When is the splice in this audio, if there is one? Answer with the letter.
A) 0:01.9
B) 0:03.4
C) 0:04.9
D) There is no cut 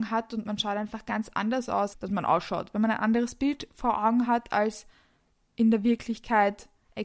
A